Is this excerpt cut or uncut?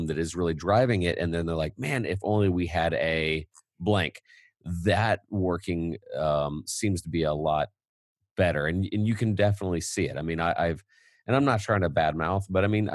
uncut